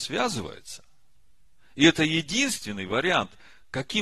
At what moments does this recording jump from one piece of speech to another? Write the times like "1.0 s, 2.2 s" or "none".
none